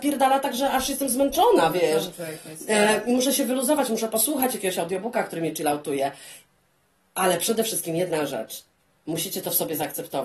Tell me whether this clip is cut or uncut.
uncut